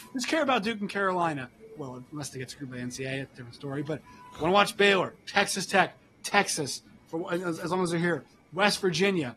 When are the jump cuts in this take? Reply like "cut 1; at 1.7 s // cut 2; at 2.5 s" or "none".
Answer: cut 1; at 1.8 s